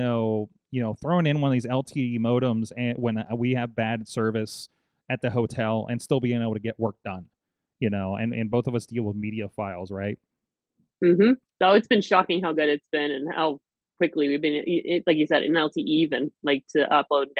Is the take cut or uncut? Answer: uncut